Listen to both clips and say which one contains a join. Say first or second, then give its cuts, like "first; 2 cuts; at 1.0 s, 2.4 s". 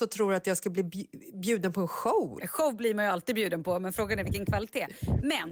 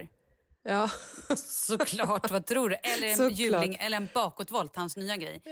first; 1 cut; at 2.4 s